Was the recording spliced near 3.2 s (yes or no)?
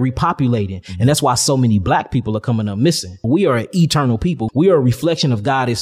yes